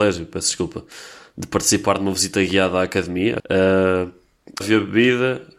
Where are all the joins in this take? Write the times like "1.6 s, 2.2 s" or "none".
3.4 s, 4.6 s